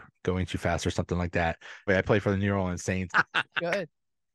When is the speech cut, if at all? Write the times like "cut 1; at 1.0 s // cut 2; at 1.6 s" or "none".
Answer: cut 1; at 1.9 s // cut 2; at 3.1 s

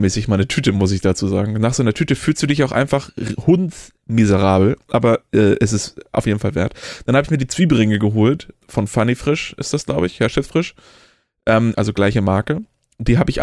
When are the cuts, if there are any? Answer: cut 1; at 8.6 s // cut 2; at 11.7 s

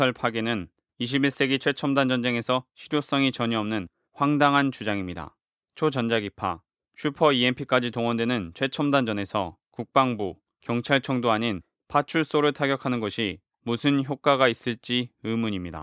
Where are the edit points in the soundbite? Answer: cut 1; at 5.6 s

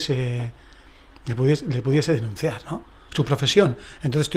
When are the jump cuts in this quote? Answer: cut 1; at 3.1 s

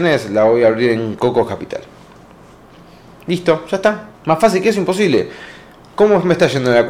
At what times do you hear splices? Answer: cut 1; at 4.1 s

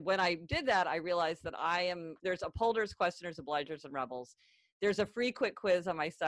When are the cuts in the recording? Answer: cut 1; at 2.2 s

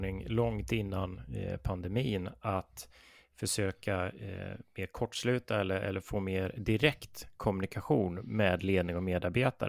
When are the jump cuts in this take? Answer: none

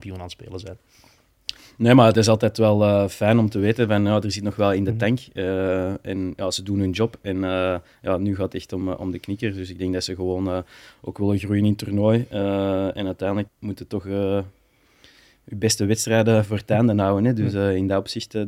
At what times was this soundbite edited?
cut 1; at 13.5 s // cut 2; at 16.5 s

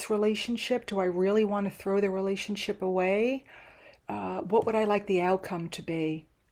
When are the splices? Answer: none

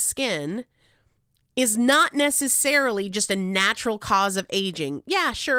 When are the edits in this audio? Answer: none

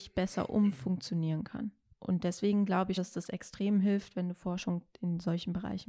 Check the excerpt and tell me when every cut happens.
cut 1; at 3.0 s

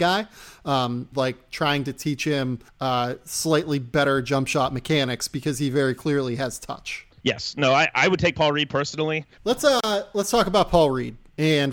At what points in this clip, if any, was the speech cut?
cut 1; at 1.1 s // cut 2; at 7.1 s // cut 3; at 9.4 s

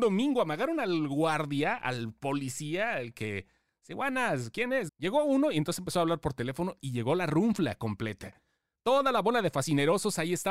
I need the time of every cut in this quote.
cut 1; at 4.9 s

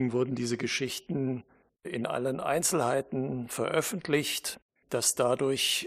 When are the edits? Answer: cut 1; at 4.8 s

